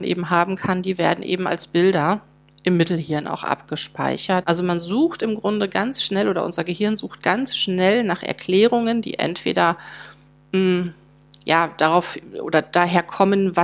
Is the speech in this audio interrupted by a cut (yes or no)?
yes